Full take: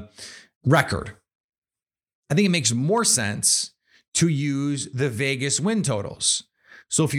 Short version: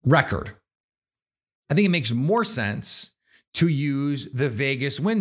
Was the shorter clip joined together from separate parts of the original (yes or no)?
no